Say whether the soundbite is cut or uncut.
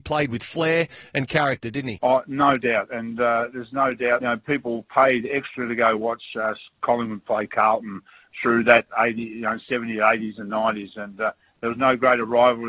uncut